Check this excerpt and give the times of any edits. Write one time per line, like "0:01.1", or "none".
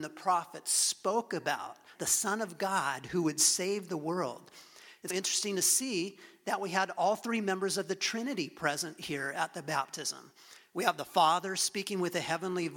0:02.0
0:05.1